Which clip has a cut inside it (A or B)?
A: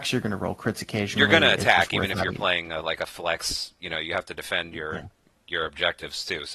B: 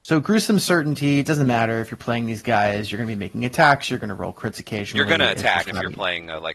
B